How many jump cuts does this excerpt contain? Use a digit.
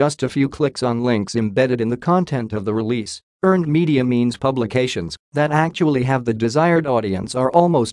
1